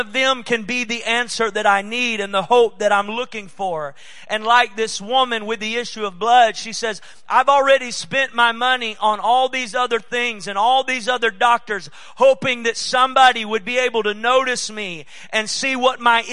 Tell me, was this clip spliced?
no; 0 cuts

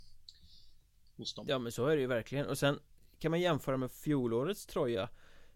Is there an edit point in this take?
no; 0 cuts

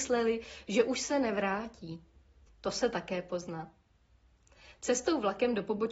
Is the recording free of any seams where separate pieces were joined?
no; 1 cut; at 2.5 s

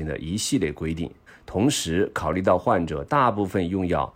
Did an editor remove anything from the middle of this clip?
yes; 1 cut; at 1.3 s

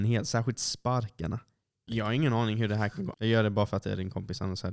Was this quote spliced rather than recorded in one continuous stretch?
yes; 2 cuts; at 1.9 s, 3.1 s

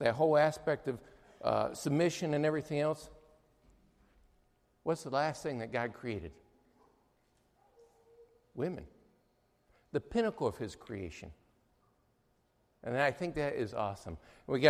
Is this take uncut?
yes; 0 cuts

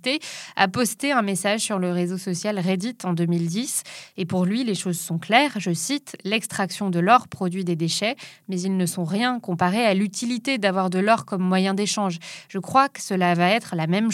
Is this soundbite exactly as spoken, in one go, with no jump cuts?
yes; 0 cuts

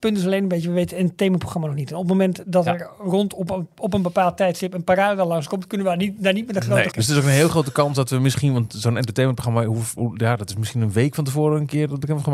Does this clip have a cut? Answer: yes; 1 cut; at 6.9 s

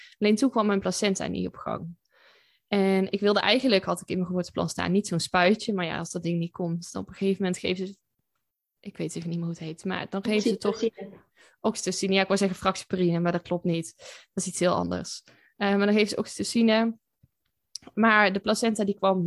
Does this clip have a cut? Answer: no; 0 cuts

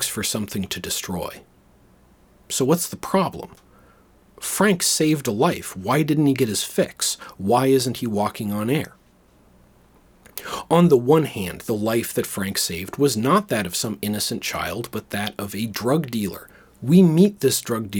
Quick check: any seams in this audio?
no; 0 cuts

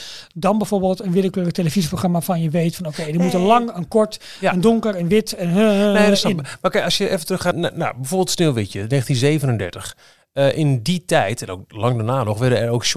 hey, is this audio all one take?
no; 1 cut; at 7.5 s

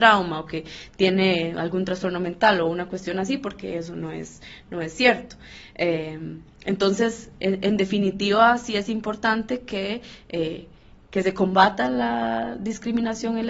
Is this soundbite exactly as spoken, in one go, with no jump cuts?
yes; 0 cuts

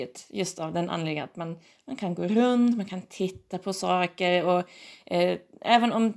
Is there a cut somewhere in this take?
no; 0 cuts

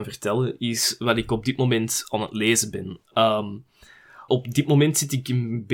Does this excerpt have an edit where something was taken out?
yes; 1 cut; at 4.3 s

